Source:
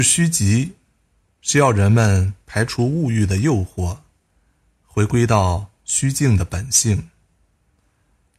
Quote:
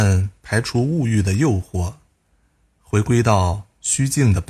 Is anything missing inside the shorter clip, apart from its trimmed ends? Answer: no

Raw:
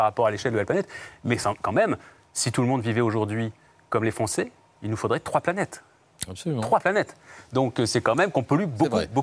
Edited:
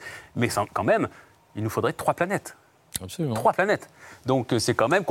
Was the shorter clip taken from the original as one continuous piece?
no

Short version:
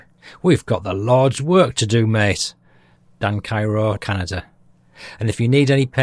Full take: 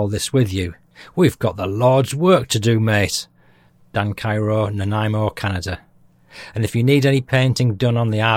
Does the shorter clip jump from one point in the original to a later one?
yes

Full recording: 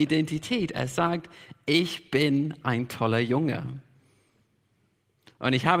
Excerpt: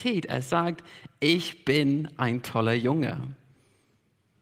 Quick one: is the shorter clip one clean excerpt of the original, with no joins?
yes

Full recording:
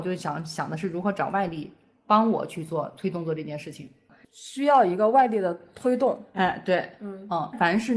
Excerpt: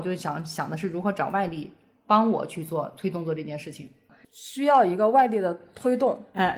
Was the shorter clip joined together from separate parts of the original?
no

